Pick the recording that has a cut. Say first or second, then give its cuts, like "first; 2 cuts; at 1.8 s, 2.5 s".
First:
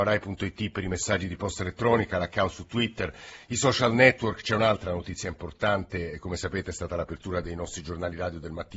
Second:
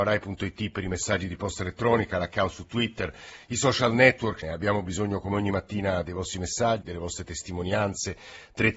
second; 2 cuts; at 4.4 s, 6.8 s